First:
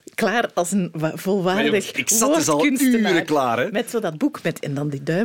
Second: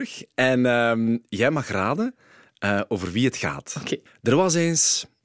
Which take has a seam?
second; 1 cut; at 4.1 s

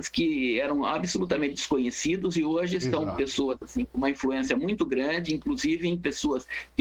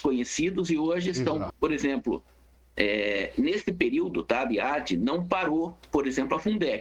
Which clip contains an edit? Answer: second; 1 cut; at 1.5 s

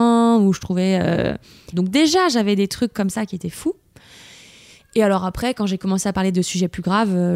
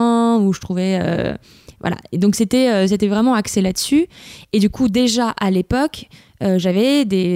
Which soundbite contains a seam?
first; 1 cut; at 1.7 s

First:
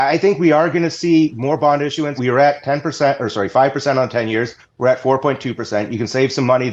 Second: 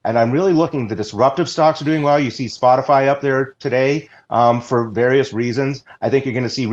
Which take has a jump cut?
first; 1 cut; at 2.2 s

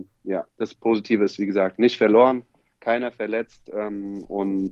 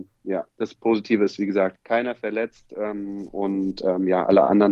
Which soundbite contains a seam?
second; 1 cut; at 1.8 s

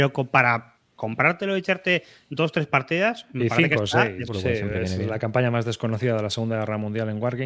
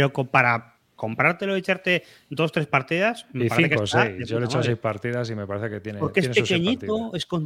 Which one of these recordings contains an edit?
first; 1 cut; at 4.3 s

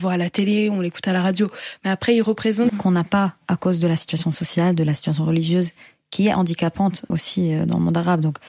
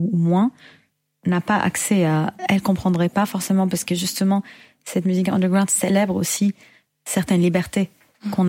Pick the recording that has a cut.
first; 2 cuts; at 2.7 s, 7.1 s

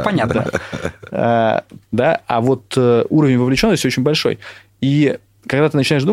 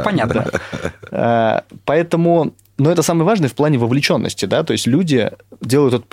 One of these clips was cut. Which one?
first; 1 cut; at 1.8 s

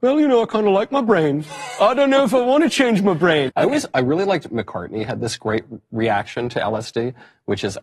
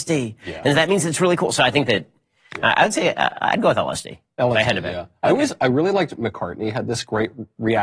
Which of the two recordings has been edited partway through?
first; 1 cut; at 3.5 s

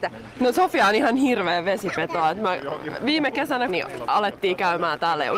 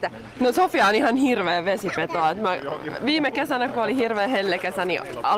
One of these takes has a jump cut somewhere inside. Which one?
first; 1 cut; at 3.7 s

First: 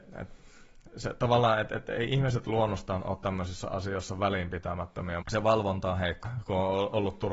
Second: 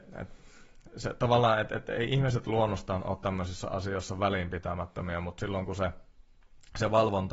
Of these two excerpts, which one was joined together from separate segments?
first; 2 cuts; at 5.2 s, 6.2 s

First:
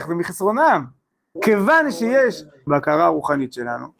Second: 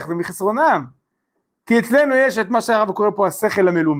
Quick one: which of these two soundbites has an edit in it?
first; 2 cuts; at 1.4 s, 2.7 s

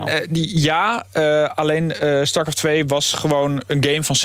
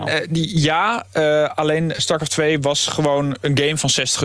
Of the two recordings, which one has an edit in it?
second; 1 cut; at 2.0 s

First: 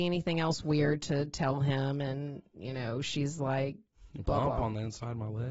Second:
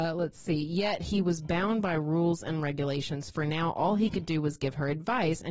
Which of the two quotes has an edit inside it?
first; 1 cut; at 4.2 s

